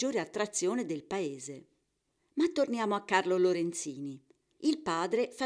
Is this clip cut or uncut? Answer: cut